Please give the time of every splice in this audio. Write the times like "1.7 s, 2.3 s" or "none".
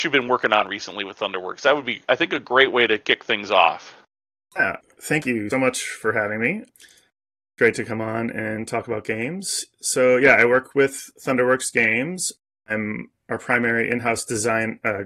5.5 s